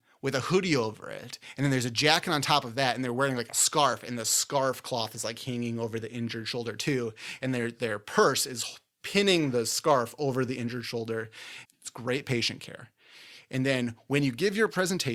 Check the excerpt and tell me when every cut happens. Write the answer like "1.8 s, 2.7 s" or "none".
11.7 s